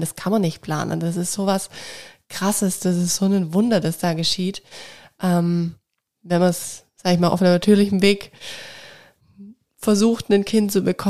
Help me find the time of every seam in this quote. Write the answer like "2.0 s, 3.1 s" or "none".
none